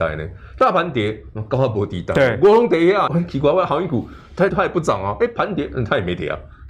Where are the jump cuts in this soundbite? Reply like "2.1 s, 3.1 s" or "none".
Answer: 3.1 s, 4.5 s